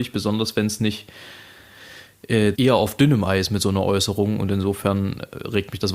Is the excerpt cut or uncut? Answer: cut